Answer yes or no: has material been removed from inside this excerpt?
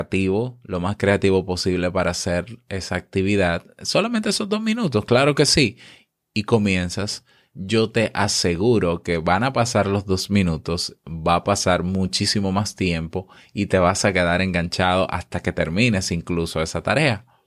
no